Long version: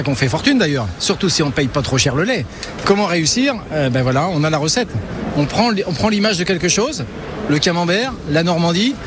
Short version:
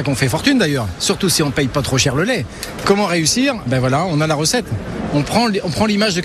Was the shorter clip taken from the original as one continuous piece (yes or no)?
no